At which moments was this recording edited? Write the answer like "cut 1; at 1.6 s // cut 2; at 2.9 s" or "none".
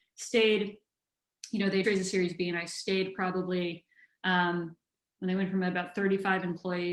cut 1; at 1.8 s

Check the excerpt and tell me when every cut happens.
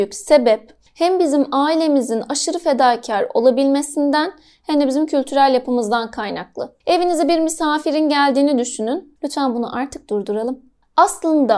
cut 1; at 9.2 s

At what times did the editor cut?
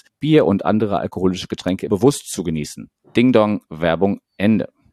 none

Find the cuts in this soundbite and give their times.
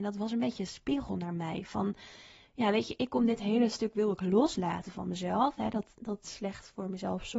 none

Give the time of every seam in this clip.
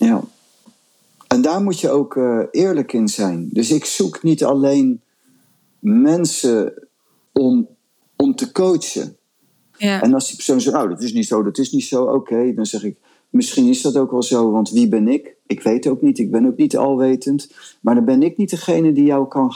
cut 1; at 9.7 s

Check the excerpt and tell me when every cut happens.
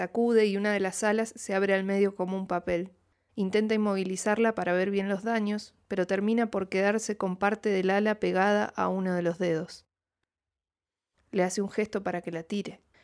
cut 1; at 3.3 s // cut 2; at 11.1 s

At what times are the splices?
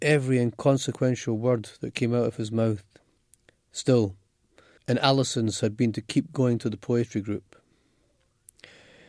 cut 1; at 4.8 s

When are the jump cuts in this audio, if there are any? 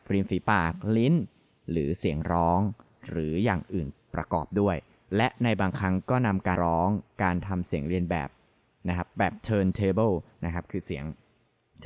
cut 1; at 6.6 s

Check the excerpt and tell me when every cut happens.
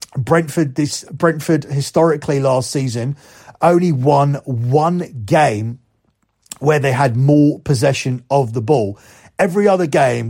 cut 1; at 1.1 s

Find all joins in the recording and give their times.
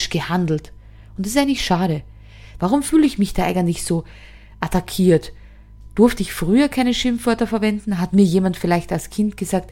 cut 1; at 2.6 s

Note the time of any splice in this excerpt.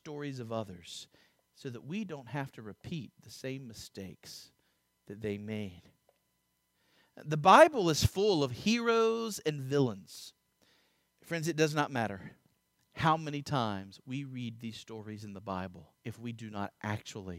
cut 1; at 11.1 s // cut 2; at 15.9 s

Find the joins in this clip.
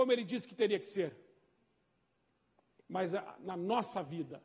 none

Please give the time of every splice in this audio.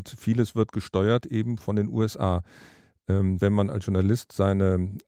cut 1; at 3.4 s

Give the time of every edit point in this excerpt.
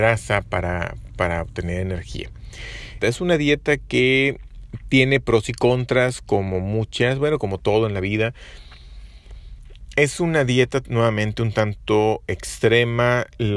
cut 1; at 3.0 s

